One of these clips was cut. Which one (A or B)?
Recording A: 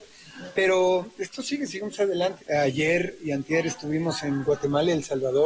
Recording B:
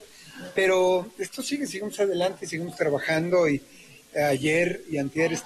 A